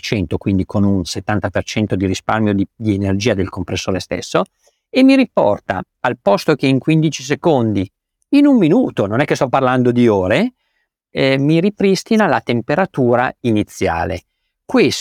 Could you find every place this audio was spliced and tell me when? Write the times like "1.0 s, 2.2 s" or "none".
none

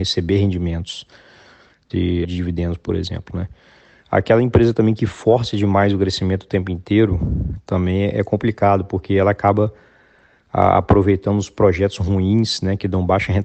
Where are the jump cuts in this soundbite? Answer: 2.2 s, 4.0 s

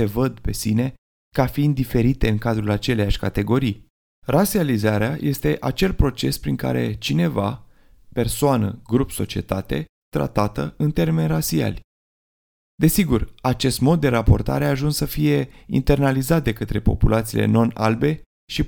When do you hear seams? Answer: 10.0 s, 12.6 s

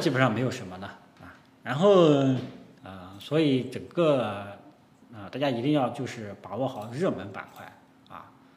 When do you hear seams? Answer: 2.7 s

